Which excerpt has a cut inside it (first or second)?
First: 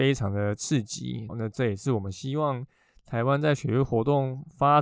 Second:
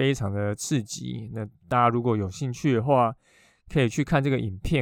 first